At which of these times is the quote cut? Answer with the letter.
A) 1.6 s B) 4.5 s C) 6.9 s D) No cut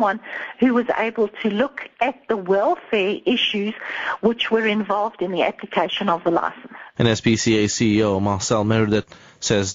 C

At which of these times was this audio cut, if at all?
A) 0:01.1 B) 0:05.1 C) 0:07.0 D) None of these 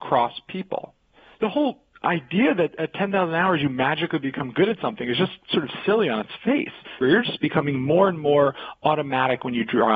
C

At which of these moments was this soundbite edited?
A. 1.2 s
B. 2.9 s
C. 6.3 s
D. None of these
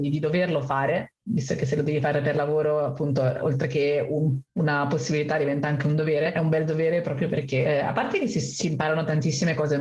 C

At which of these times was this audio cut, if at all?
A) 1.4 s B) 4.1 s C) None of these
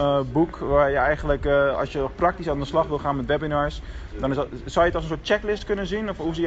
C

